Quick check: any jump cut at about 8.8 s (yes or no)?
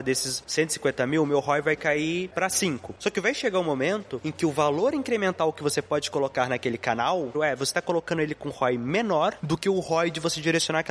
no